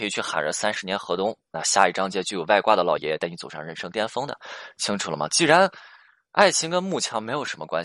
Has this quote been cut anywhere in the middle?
no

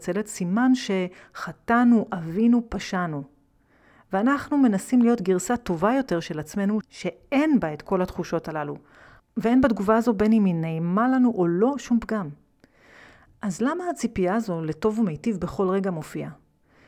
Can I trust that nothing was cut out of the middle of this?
no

